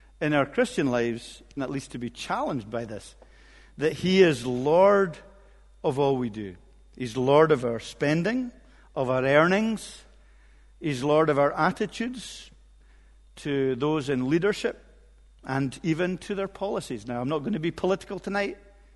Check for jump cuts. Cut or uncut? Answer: cut